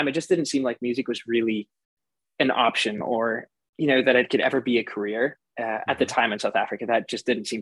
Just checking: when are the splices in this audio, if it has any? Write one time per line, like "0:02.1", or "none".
none